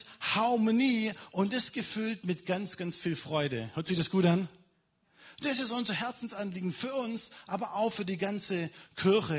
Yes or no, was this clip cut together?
no